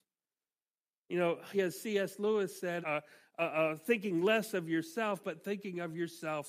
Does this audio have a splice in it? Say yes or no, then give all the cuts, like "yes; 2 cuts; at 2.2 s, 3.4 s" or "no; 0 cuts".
yes; 2 cuts; at 1.5 s, 2.8 s